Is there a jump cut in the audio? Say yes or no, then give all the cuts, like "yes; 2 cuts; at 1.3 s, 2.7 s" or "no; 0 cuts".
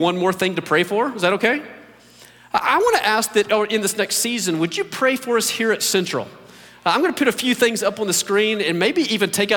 no; 0 cuts